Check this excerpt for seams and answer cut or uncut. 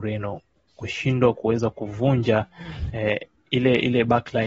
uncut